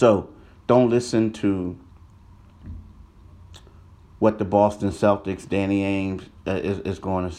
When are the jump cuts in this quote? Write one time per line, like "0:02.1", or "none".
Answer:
none

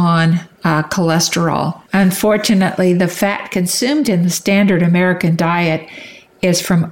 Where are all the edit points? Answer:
0:01.9

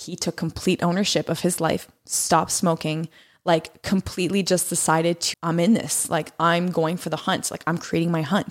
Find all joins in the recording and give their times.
0:05.3

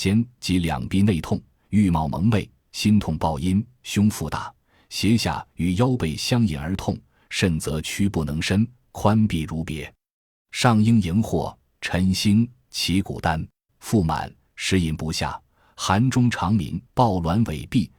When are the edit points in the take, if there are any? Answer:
0:13.7
0:16.9

